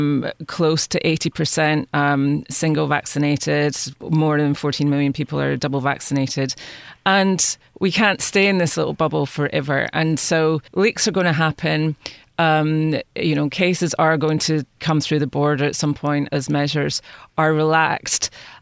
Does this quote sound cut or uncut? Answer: cut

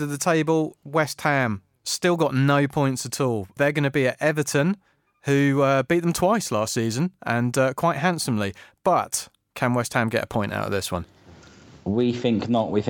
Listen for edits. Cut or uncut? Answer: uncut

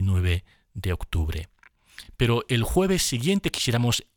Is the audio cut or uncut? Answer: uncut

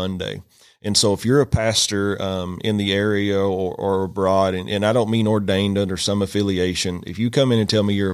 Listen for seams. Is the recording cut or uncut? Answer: uncut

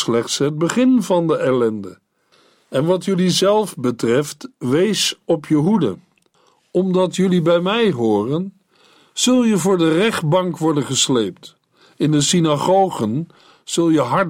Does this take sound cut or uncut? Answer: uncut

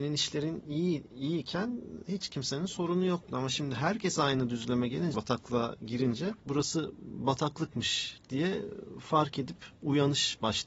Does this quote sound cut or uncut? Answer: cut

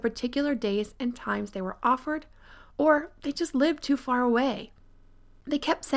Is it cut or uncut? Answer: uncut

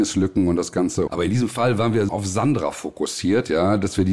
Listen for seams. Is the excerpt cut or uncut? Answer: cut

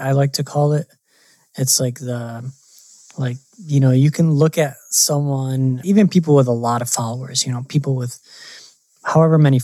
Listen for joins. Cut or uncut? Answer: cut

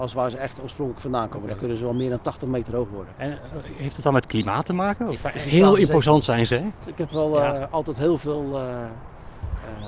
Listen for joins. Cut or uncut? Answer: cut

